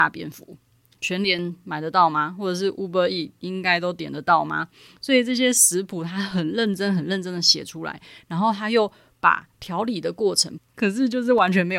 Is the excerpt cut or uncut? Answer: cut